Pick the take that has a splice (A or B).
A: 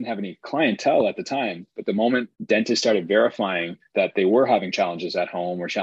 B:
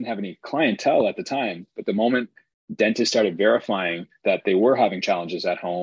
A